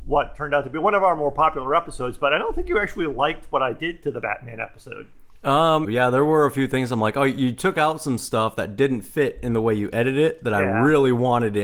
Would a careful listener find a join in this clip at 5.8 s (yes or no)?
yes